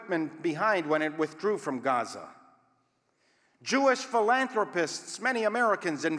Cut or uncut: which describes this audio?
uncut